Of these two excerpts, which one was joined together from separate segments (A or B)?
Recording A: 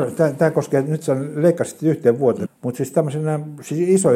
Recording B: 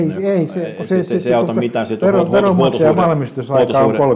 A